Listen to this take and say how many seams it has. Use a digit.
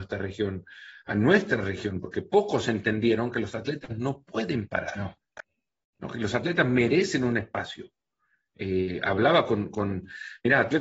0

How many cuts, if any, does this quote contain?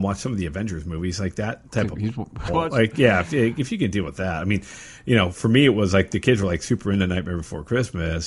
1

